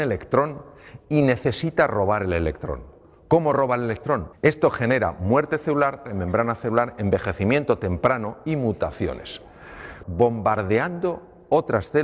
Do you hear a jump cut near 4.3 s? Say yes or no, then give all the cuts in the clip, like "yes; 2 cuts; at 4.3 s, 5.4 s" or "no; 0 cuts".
yes; 3 cuts; at 4.3 s, 6.1 s, 10.0 s